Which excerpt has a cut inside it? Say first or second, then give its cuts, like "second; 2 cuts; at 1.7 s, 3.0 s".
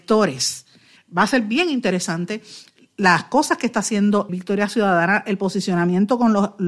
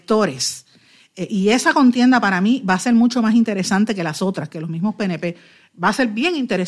first; 2 cuts; at 1.0 s, 4.3 s